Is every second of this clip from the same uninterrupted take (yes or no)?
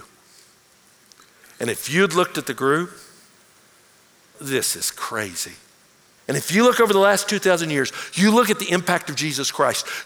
no